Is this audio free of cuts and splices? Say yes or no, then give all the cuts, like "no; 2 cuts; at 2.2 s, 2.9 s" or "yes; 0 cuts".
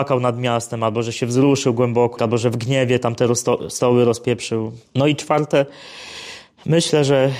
no; 2 cuts; at 2.2 s, 4.9 s